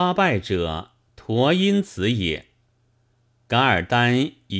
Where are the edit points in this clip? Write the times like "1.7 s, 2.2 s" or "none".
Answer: none